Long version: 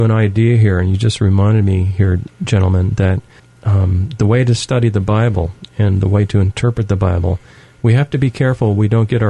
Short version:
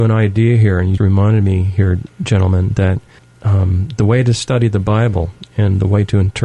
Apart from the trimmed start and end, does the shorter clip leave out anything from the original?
yes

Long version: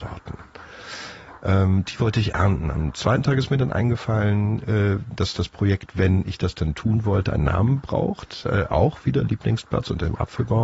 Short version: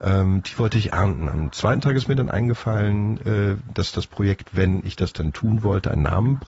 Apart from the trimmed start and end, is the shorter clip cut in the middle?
no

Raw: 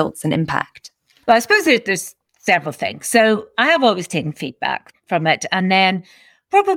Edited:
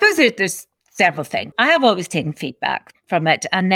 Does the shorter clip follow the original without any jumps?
no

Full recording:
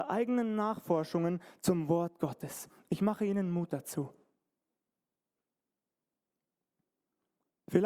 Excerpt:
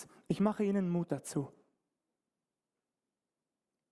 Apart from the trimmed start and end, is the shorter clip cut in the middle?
no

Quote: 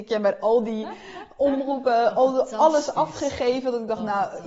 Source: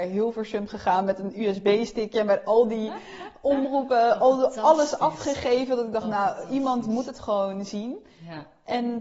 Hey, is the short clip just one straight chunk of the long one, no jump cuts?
yes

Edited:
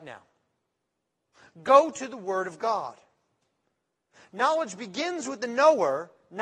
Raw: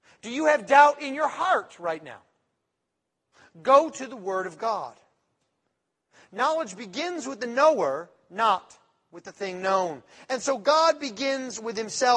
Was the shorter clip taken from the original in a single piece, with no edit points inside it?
yes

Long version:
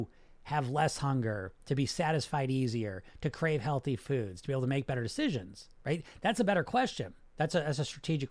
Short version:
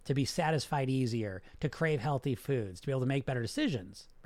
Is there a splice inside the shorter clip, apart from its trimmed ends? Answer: no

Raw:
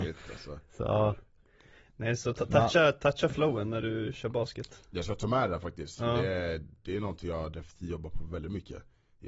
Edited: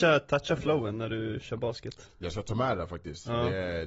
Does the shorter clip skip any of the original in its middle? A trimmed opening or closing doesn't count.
no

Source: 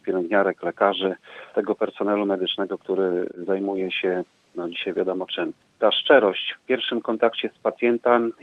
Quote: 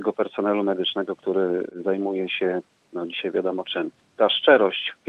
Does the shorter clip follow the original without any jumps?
yes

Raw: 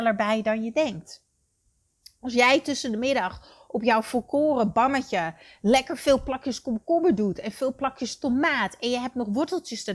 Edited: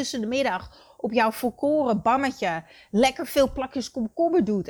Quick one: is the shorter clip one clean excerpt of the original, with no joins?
yes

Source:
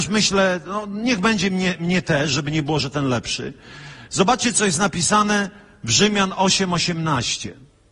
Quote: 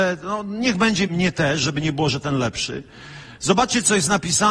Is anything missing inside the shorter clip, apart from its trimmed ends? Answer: yes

